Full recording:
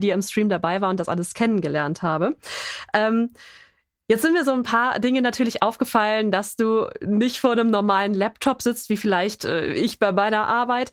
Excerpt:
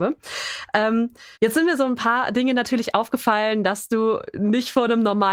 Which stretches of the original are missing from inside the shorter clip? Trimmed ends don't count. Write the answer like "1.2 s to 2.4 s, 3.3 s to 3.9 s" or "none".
3.5 s to 4.0 s